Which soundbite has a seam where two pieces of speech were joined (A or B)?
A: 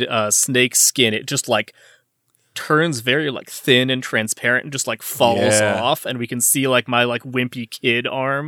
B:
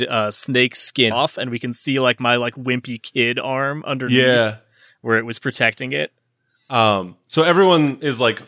B